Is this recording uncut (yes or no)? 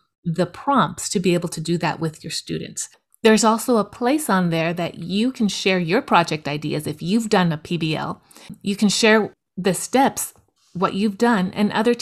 yes